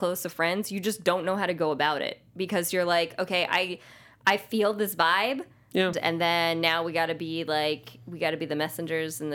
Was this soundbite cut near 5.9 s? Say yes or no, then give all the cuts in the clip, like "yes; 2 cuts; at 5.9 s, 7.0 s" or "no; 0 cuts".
yes; 1 cut; at 5.9 s